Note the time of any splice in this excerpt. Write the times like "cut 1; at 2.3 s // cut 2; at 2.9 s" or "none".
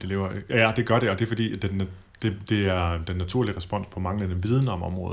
none